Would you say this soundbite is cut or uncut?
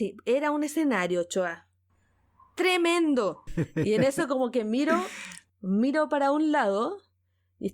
cut